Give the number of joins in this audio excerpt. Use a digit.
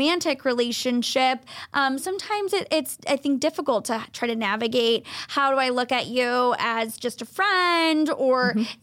0